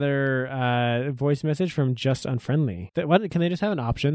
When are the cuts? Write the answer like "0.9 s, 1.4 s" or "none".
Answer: 2.9 s